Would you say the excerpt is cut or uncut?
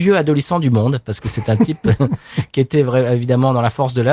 uncut